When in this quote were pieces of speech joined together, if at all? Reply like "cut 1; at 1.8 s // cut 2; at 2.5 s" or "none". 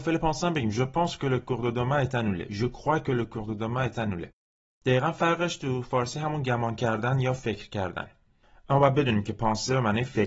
none